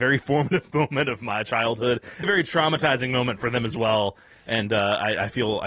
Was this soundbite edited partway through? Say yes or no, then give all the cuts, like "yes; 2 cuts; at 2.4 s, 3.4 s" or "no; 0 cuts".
yes; 1 cut; at 2.2 s